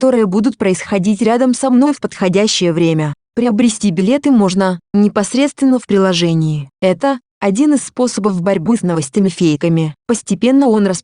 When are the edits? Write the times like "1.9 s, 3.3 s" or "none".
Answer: 4.8 s, 6.7 s, 10.0 s